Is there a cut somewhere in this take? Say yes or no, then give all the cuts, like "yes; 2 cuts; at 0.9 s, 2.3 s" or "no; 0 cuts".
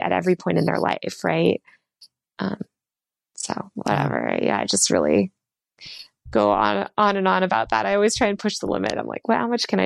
no; 0 cuts